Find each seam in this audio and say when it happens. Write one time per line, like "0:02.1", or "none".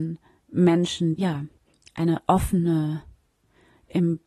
0:01.2